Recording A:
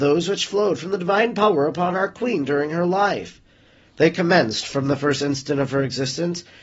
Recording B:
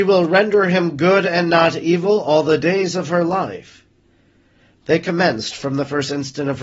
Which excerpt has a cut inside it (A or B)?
B